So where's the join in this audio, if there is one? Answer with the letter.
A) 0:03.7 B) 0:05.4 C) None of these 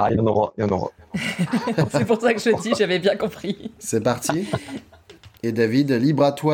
B